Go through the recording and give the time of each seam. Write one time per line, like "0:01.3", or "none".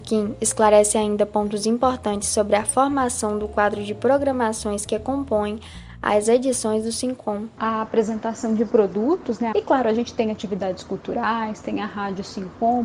0:07.6
0:09.5